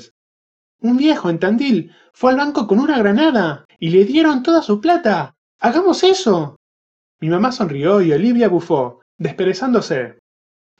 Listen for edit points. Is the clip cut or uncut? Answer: cut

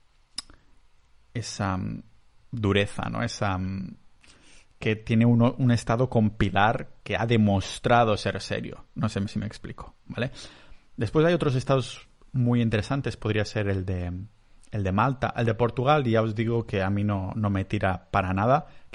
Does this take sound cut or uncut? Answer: uncut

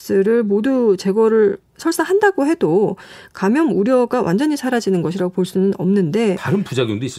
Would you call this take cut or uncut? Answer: uncut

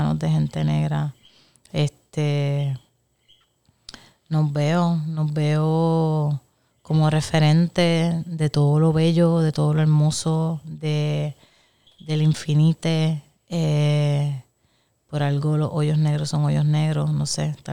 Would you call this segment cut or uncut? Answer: uncut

